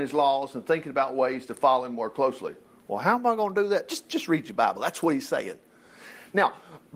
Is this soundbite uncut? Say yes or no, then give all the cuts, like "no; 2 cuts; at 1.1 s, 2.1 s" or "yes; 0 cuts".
yes; 0 cuts